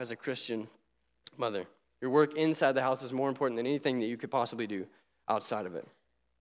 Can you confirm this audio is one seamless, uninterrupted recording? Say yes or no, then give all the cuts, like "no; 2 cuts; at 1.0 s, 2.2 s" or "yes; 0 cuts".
yes; 0 cuts